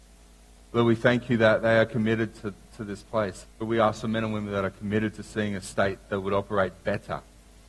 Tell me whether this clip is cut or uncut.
cut